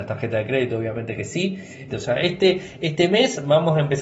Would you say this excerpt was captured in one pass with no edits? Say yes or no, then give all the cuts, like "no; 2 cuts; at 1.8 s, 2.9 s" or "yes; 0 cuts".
no; 1 cut; at 1.9 s